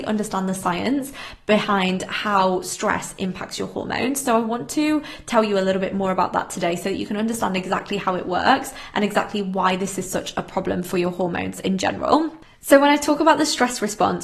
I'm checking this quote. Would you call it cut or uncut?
uncut